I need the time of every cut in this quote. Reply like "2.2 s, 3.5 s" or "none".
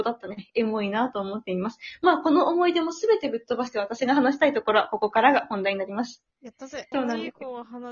6.9 s